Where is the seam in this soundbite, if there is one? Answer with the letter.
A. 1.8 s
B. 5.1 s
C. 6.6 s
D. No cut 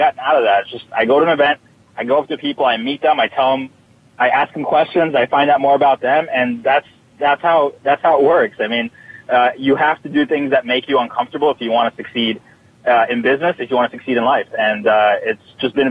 D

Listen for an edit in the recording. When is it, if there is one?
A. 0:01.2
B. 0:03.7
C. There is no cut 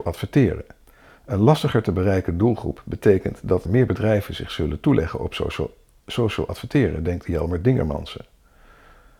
B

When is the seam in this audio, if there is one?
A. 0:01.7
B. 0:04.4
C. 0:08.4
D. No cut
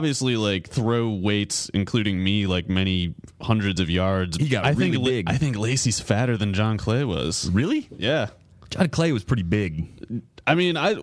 B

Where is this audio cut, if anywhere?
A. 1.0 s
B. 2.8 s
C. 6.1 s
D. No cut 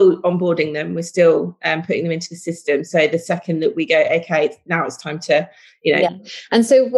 C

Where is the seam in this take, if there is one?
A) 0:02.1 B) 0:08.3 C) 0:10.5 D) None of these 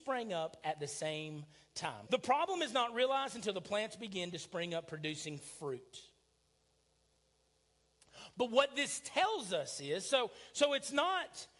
A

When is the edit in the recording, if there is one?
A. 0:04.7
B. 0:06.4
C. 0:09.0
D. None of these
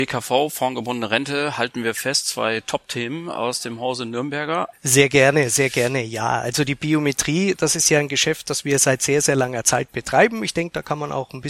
A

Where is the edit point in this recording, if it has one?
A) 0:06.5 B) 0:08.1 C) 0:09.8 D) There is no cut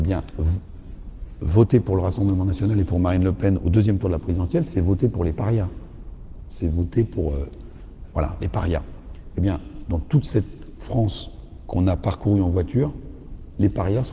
B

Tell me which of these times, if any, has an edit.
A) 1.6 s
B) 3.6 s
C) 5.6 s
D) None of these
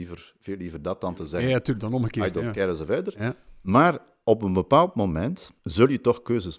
C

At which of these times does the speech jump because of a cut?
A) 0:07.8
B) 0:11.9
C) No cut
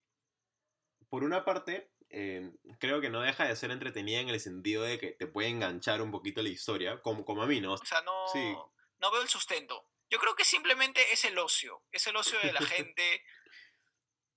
A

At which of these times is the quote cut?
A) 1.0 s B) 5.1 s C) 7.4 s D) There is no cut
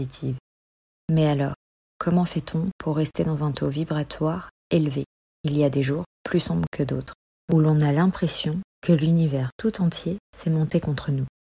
C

